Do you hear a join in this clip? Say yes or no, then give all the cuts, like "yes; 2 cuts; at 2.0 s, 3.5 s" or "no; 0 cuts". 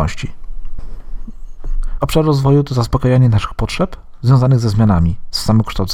yes; 1 cut; at 2.0 s